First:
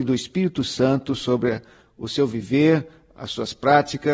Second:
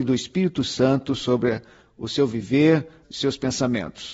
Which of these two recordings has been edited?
second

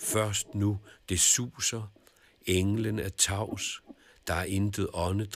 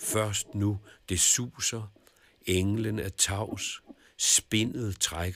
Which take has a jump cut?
second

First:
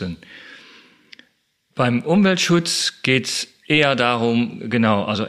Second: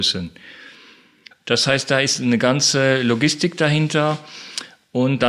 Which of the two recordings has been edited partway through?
second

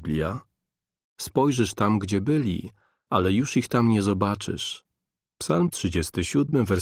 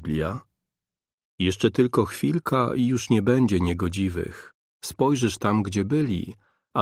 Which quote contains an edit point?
first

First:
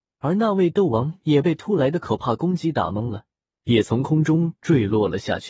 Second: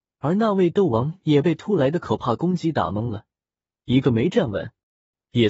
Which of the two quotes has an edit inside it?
first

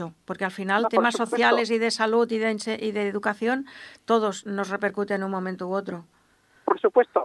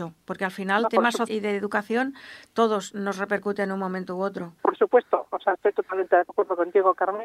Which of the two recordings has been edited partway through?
second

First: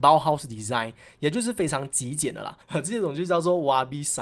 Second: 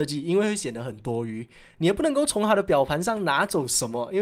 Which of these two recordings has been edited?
first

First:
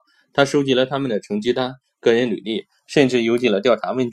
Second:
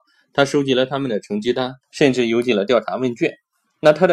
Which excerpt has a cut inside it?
second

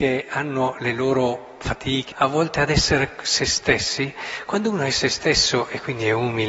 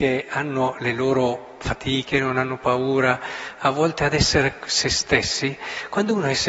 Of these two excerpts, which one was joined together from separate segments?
first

